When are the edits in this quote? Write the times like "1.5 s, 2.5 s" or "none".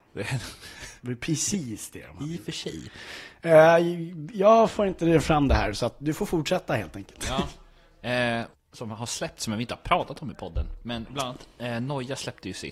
8.5 s